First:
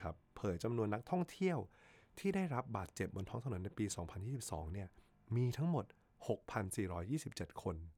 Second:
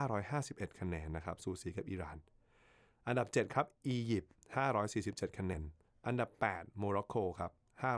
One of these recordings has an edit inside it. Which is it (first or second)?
second